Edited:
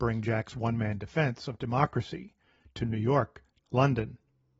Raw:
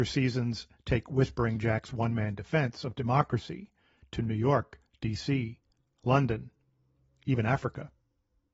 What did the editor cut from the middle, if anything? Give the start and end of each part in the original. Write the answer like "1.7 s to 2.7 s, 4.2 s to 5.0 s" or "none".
4.9 s to 5.9 s